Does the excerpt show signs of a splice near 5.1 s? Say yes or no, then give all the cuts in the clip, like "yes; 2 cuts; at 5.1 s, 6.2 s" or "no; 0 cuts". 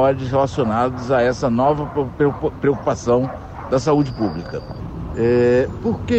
yes; 1 cut; at 5.1 s